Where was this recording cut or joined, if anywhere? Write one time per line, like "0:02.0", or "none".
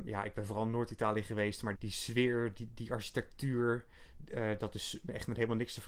0:01.7